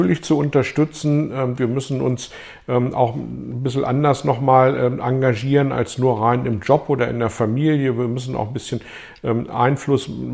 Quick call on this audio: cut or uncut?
cut